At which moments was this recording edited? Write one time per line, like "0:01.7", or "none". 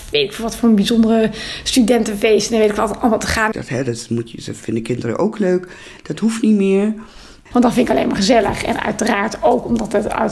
0:03.5
0:06.0
0:07.5